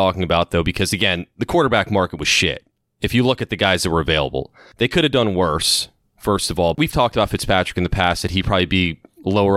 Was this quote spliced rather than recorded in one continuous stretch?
yes; 1 cut; at 6.7 s

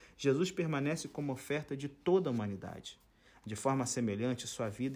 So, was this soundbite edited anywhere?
no; 0 cuts

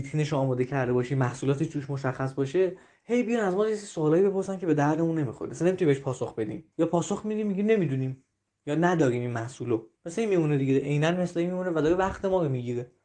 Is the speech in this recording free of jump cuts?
no; 2 cuts; at 6.7 s, 9.9 s

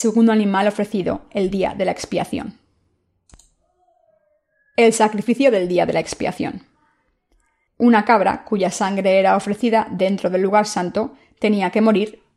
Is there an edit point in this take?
yes; 1 cut; at 7.7 s

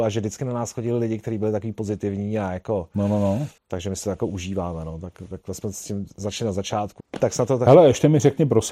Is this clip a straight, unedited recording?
no; 2 cuts; at 3.6 s, 7.0 s

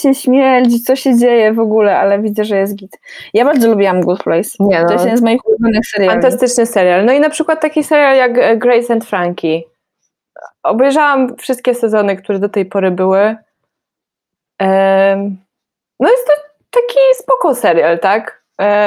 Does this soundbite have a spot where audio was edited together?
no; 0 cuts

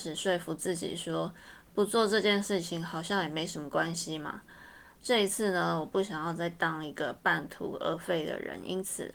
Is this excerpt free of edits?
yes; 0 cuts

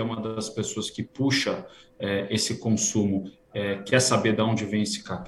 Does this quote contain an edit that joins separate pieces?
yes; 1 cut; at 3.4 s

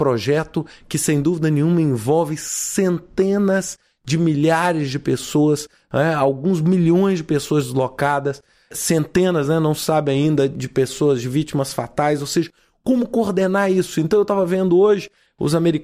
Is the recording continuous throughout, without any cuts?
yes; 0 cuts

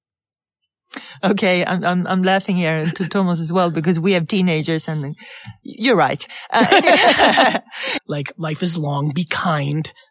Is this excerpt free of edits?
no; 1 cut; at 8.0 s

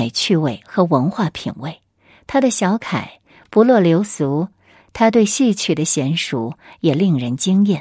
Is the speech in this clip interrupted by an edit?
yes; 1 cut; at 4.8 s

